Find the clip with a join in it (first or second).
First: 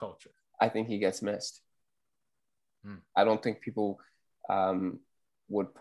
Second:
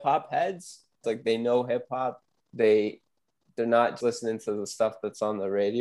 second